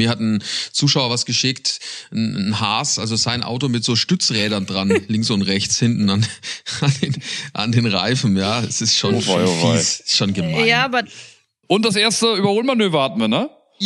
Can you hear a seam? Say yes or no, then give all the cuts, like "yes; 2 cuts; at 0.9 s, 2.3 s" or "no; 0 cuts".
no; 0 cuts